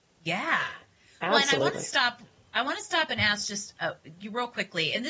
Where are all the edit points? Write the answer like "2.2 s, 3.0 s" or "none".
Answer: none

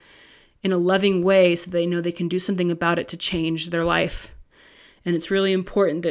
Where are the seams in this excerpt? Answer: none

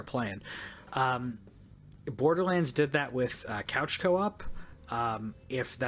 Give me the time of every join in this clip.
none

